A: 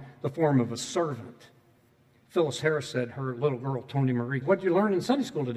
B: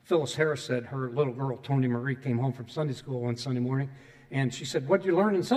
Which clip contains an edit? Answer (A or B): A